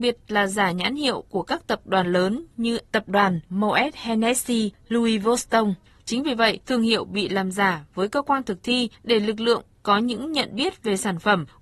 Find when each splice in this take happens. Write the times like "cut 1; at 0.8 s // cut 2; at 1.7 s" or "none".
cut 1; at 6.6 s